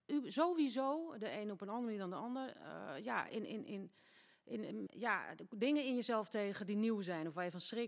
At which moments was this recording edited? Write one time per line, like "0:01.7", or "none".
0:04.9